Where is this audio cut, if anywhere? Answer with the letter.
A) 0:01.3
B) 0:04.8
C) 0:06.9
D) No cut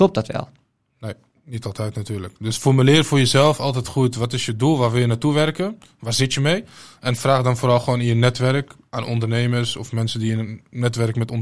D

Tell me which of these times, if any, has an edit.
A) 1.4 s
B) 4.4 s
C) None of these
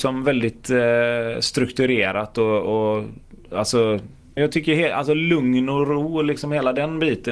B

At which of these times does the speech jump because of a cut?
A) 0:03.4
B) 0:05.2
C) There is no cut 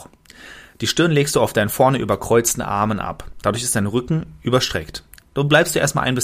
C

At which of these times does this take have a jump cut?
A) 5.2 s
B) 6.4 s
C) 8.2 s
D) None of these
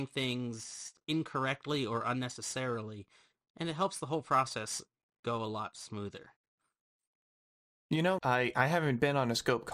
C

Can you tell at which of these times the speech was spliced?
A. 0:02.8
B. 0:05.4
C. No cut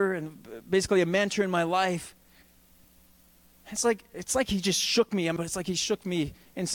B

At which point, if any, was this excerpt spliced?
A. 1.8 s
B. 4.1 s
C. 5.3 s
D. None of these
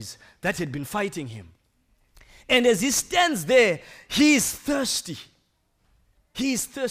D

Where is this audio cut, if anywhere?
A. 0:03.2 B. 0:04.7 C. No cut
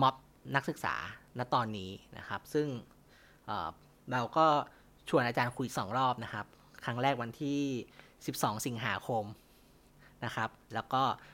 C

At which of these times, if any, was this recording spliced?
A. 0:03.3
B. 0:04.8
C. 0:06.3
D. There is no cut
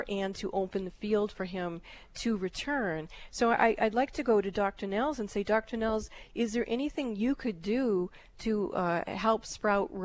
D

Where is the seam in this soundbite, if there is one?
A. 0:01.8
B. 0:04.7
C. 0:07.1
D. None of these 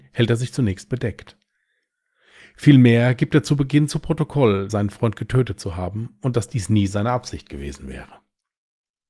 B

